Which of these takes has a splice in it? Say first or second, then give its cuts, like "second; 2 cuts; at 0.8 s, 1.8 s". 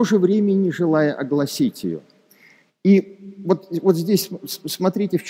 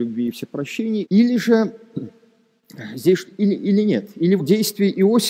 second; 3 cuts; at 1.0 s, 3.3 s, 4.4 s